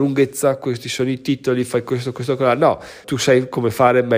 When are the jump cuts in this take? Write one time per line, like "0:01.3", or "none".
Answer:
0:03.0